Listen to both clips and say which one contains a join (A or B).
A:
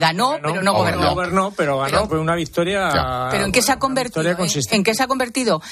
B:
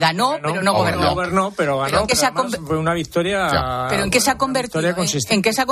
A